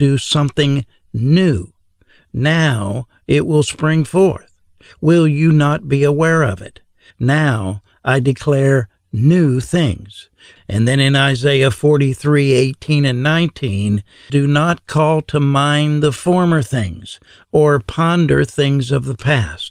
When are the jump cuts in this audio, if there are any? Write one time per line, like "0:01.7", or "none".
0:07.1
0:10.6
0:14.3